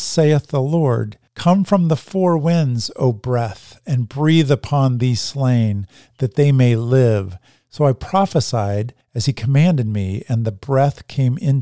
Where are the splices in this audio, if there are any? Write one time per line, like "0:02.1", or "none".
none